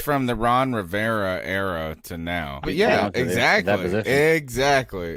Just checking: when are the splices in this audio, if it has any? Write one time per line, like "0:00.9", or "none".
0:02.6